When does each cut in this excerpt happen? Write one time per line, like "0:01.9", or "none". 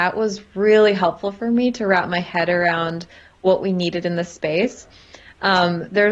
none